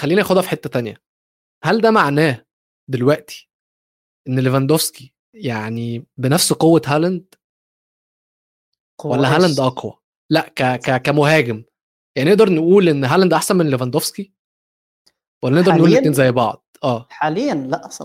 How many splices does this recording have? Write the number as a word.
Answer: one